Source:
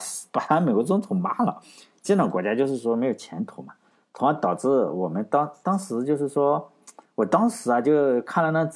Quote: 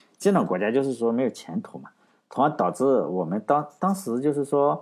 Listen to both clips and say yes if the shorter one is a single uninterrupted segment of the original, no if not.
yes